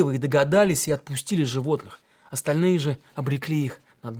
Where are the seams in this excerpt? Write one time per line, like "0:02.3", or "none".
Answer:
none